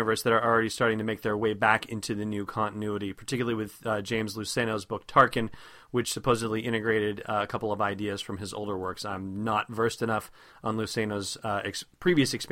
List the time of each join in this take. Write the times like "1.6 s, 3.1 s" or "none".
none